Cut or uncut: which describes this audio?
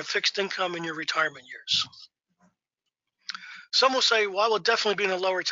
uncut